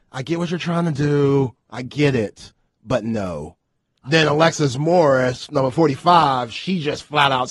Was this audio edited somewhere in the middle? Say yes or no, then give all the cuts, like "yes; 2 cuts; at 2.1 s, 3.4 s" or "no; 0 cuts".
yes; 1 cut; at 4.0 s